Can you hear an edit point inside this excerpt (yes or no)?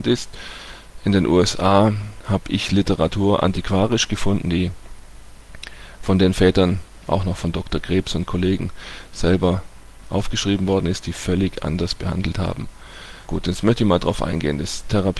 yes